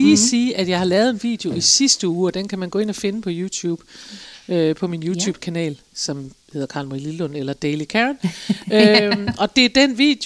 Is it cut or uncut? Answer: cut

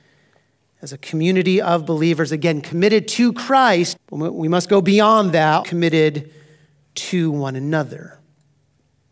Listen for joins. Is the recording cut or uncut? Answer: cut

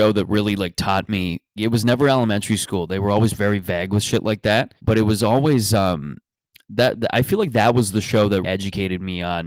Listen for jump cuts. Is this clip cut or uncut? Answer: cut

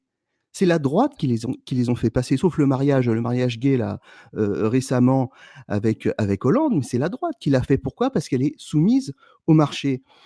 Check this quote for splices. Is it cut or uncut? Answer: uncut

